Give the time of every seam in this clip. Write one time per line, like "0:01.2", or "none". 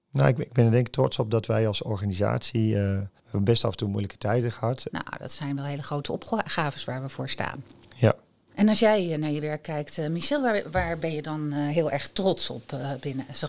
0:03.2
0:04.9